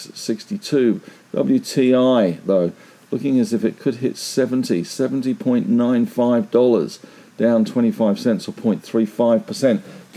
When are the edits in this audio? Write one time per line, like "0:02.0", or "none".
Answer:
none